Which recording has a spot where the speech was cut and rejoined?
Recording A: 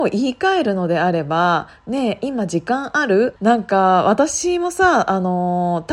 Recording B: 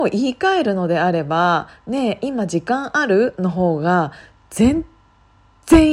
A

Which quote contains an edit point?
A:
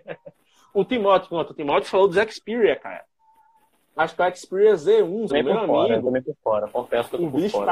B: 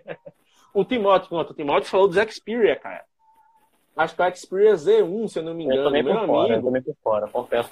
A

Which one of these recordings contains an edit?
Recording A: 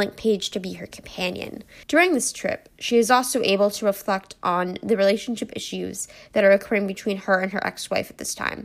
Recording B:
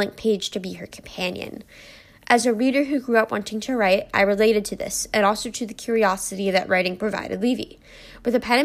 A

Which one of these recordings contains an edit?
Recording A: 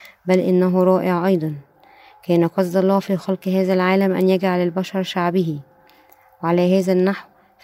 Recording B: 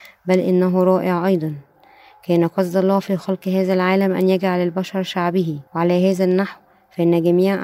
B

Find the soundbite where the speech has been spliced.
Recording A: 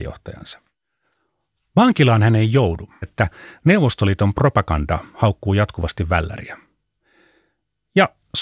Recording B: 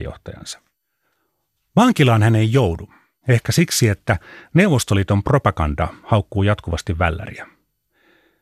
A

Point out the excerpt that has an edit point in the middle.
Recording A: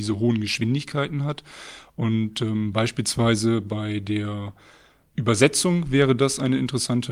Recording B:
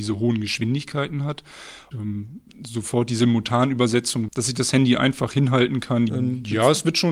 B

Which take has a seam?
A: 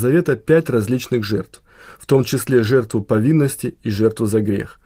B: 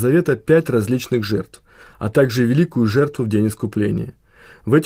B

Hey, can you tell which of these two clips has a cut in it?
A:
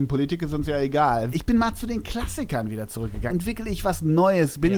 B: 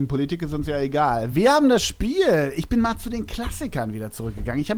A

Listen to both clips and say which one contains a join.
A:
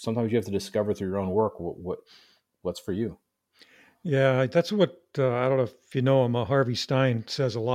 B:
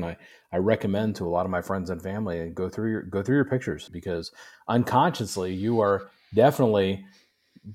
B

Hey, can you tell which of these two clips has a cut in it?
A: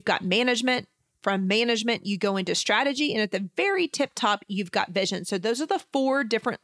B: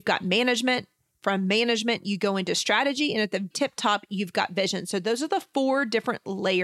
B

